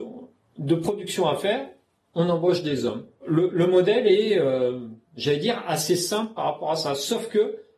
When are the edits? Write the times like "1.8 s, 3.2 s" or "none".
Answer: 3.2 s